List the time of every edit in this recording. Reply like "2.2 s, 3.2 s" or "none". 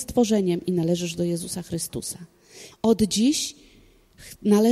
2.7 s